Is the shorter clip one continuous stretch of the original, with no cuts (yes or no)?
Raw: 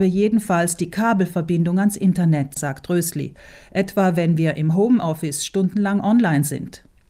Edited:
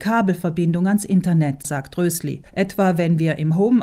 no